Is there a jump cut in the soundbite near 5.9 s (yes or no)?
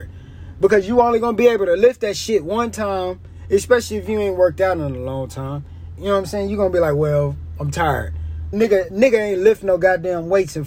yes